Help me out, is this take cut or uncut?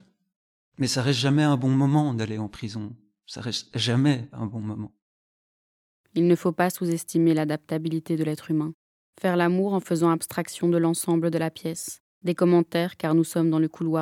cut